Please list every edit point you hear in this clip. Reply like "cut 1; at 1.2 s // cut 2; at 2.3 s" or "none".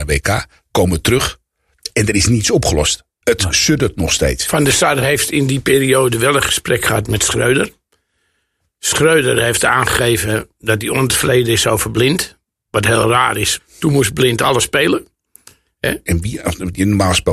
cut 1; at 13.6 s // cut 2; at 16.1 s